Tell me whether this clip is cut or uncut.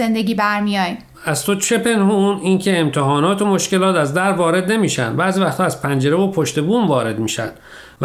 cut